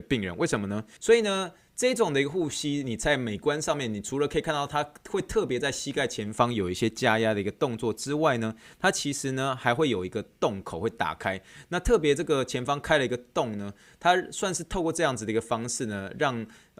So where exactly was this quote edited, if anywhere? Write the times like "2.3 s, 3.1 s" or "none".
1.0 s